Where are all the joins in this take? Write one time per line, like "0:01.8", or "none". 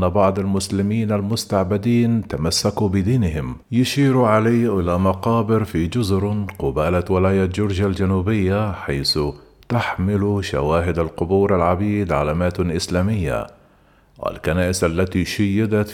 0:03.6